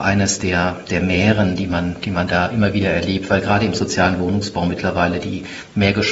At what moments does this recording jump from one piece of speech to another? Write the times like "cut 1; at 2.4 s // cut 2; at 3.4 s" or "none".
none